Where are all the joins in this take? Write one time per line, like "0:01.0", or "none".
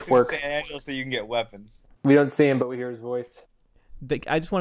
0:02.0